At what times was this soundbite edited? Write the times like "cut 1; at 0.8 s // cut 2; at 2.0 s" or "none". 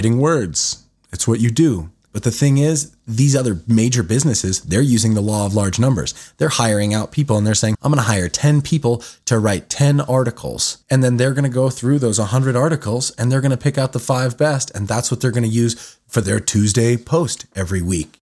cut 1; at 2.1 s // cut 2; at 7.7 s // cut 3; at 10.8 s